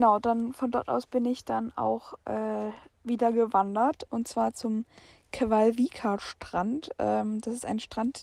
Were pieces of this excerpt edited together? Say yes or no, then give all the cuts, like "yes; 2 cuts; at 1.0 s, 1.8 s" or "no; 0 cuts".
no; 0 cuts